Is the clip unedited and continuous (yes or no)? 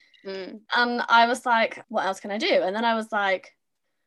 no